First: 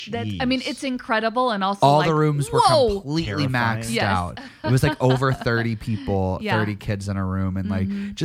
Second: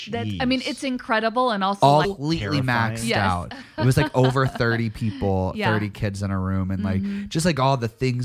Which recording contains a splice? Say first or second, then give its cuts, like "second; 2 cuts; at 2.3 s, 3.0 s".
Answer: second; 1 cut; at 2.0 s